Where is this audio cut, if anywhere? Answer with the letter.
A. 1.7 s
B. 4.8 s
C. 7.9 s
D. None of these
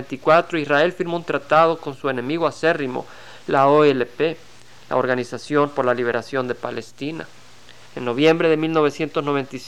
C